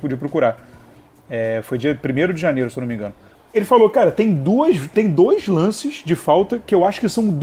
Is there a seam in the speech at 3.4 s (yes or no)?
no